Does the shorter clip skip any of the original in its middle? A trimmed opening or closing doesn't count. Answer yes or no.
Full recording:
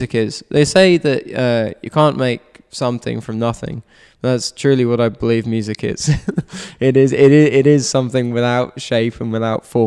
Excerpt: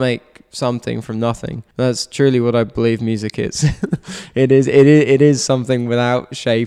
yes